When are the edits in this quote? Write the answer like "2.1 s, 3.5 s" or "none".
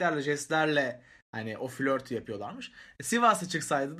none